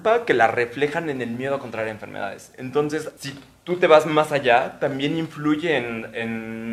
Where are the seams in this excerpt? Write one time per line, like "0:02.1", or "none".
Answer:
0:03.2